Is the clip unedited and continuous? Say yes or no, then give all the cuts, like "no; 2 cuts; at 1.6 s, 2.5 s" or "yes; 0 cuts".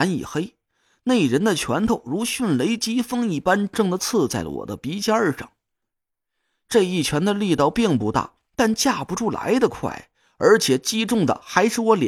no; 1 cut; at 3.7 s